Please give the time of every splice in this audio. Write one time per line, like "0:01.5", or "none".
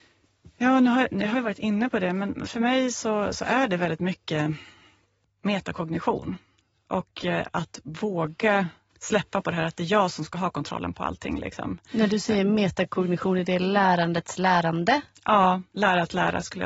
none